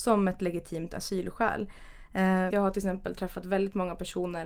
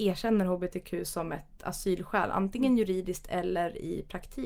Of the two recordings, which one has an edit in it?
first; 1 cut; at 2.5 s

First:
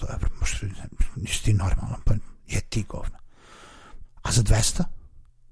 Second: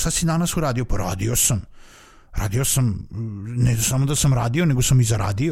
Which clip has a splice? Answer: first; 1 cut; at 4.0 s

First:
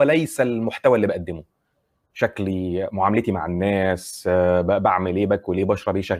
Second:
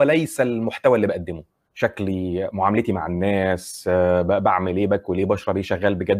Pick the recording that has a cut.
second; 1 cut; at 1.7 s

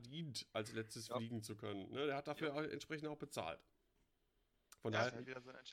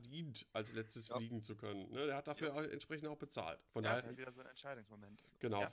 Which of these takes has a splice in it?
second; 1 cut; at 3.7 s

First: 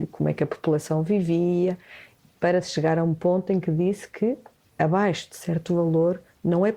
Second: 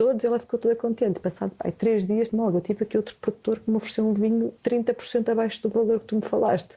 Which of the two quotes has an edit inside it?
second; 2 cuts; at 2.3 s, 4.6 s

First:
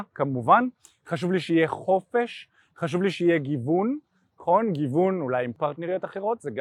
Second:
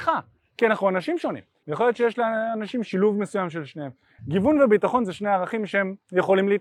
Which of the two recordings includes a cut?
second; 2 cuts; at 1.6 s, 4.2 s

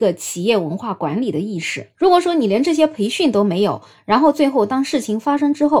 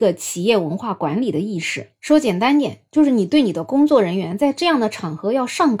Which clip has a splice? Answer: first; 1 cut; at 1.9 s

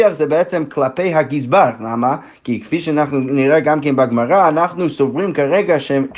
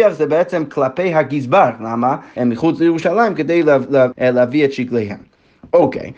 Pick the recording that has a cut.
second; 2 cuts; at 2.4 s, 4.1 s

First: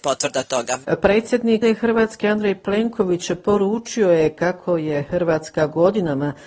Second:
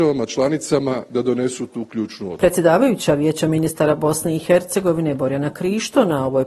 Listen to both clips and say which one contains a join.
first; 1 cut; at 1.6 s

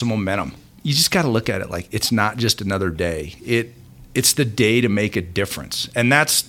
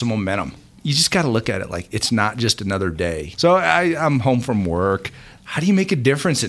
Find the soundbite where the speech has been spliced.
second; 2 cuts; at 3.3 s, 5.4 s

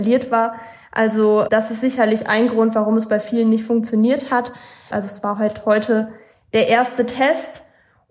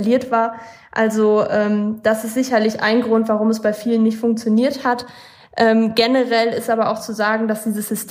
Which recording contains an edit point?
first; 2 cuts; at 1.5 s, 4.9 s

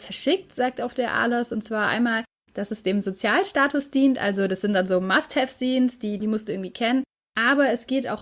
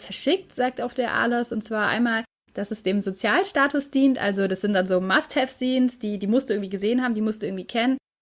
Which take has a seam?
first; 1 cut; at 6.2 s

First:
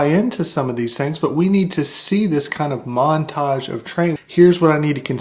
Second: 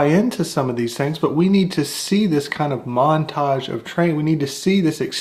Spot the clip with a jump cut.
first; 1 cut; at 4.2 s

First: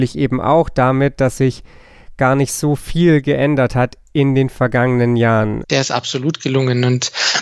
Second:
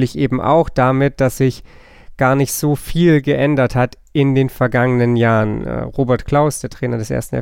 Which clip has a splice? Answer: first; 1 cut; at 5.6 s

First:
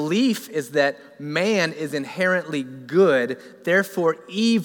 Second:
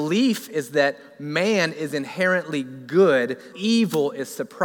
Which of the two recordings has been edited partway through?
second; 1 cut; at 3.5 s

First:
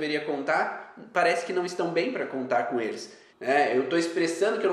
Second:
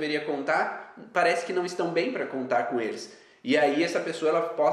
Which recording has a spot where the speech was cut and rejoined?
first; 1 cut; at 3.3 s

